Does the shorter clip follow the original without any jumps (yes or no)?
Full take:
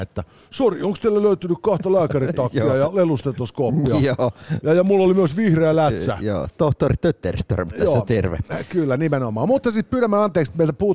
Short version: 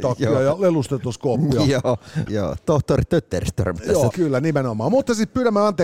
no